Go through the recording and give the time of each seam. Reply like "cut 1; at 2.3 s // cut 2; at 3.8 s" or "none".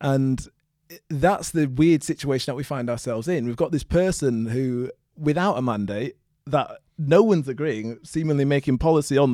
none